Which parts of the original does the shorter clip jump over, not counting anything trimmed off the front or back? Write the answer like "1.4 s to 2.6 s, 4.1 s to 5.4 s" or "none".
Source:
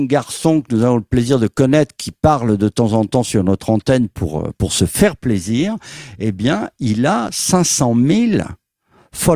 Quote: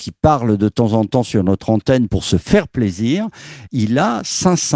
4.1 s to 4.6 s, 6.2 s to 6.7 s